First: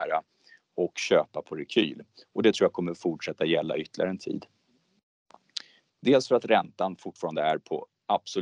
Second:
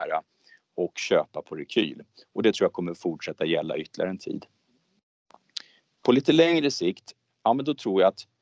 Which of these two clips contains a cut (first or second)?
first